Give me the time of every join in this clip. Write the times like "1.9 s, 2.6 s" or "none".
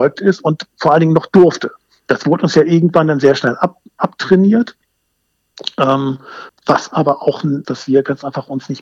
6.5 s, 7.6 s